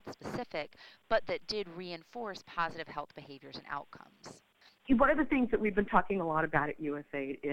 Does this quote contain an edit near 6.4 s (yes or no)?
no